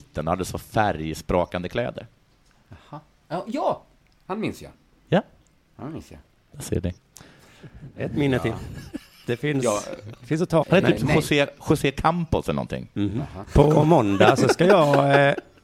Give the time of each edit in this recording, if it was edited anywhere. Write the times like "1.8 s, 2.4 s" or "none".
10.6 s, 13.4 s